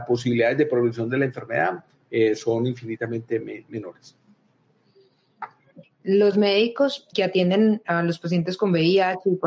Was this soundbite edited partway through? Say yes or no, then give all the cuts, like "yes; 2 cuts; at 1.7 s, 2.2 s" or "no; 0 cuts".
yes; 2 cuts; at 5.8 s, 7.1 s